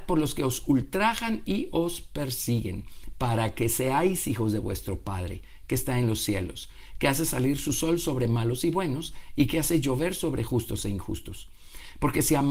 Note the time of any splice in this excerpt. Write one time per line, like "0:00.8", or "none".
none